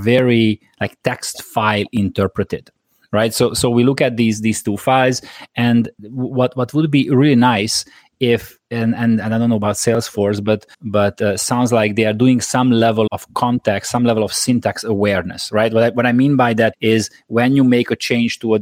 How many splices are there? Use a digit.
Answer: 3